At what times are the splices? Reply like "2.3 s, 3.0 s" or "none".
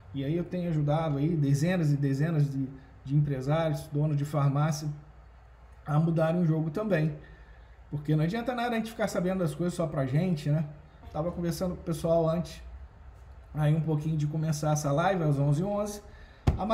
11.0 s